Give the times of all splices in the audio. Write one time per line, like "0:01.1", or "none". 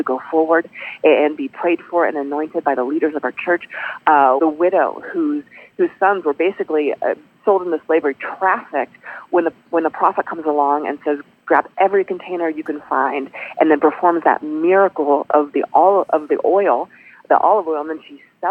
0:04.4